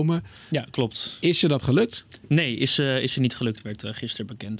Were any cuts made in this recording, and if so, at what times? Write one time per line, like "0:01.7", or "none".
none